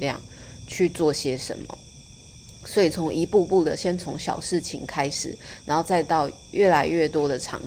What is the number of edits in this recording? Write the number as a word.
zero